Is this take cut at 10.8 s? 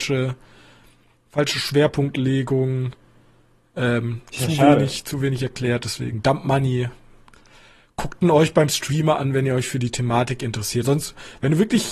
yes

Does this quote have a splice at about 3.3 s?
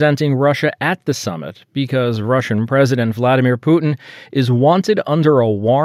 no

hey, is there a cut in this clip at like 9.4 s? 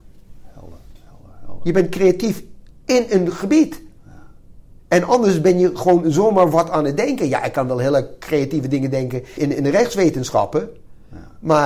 yes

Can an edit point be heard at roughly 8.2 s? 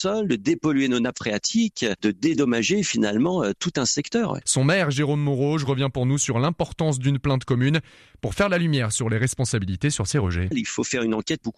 no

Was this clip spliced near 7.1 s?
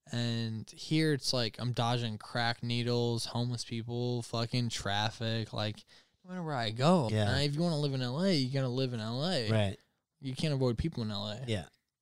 yes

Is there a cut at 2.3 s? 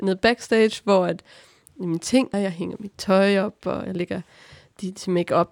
yes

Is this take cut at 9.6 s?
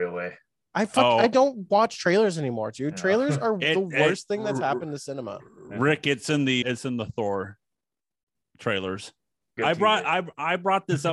yes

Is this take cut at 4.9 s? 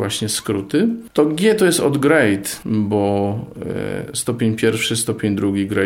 no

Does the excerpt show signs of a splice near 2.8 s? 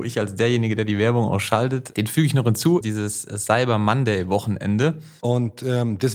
yes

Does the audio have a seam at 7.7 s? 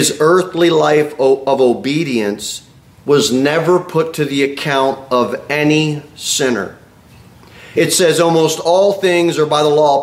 yes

